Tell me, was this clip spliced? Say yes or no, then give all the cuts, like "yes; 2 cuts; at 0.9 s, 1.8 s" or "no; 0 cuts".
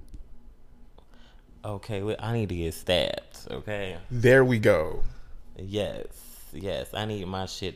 no; 0 cuts